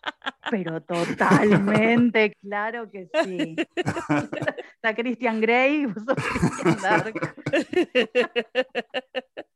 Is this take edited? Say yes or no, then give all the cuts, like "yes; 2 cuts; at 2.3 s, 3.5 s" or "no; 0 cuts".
yes; 1 cut; at 2.3 s